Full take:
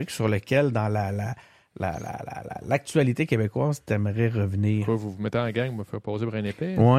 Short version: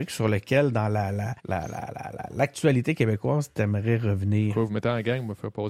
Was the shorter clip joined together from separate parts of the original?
yes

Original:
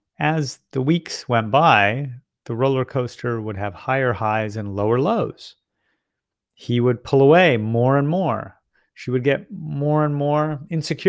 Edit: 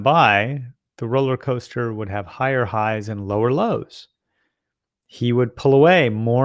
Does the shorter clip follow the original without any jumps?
yes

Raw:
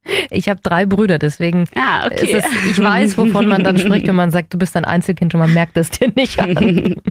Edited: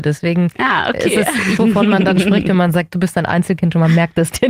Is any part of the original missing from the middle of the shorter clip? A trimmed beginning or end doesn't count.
yes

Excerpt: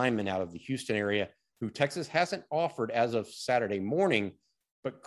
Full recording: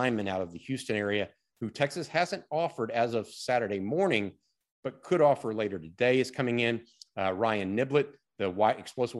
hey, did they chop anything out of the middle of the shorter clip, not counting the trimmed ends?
no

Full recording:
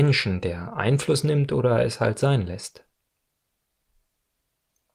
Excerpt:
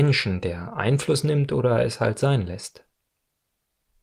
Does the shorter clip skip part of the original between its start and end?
no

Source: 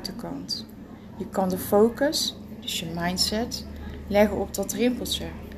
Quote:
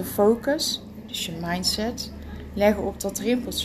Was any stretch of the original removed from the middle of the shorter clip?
no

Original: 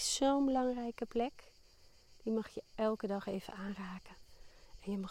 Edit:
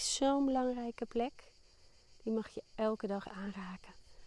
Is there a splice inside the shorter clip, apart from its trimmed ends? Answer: yes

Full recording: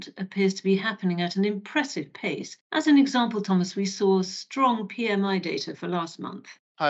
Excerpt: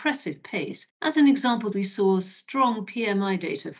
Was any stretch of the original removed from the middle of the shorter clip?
yes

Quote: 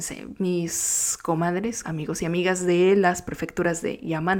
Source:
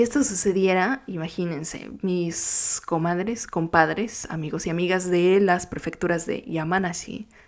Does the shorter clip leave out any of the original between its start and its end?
yes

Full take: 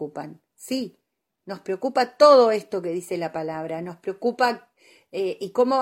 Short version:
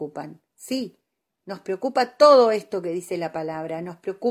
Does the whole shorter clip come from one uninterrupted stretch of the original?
yes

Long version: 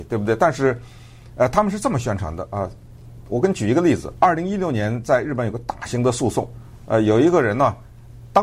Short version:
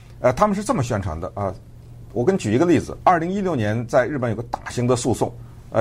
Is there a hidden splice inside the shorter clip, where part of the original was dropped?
no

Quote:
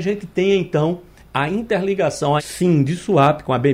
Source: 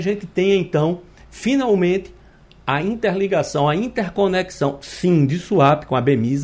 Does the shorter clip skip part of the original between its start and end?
yes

